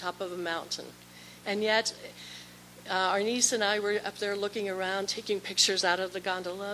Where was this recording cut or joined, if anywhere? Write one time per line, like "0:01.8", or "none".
0:01.4